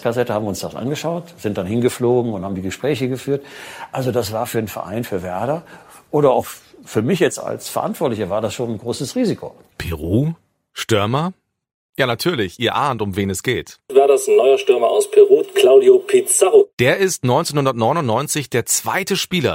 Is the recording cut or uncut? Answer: cut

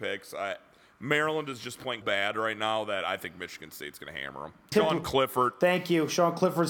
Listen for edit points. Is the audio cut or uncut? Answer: cut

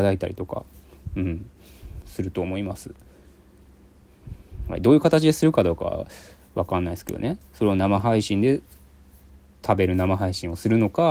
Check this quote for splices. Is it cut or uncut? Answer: uncut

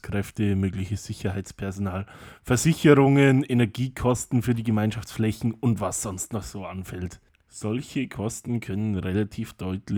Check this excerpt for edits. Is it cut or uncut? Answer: uncut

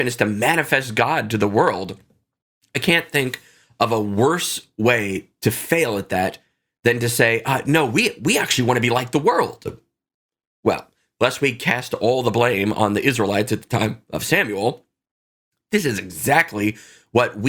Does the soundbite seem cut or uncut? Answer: uncut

